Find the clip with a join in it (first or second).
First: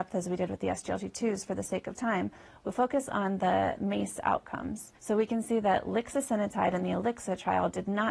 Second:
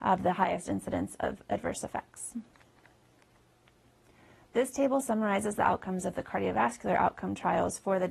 first